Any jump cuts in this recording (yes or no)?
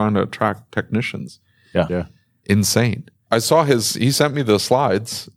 yes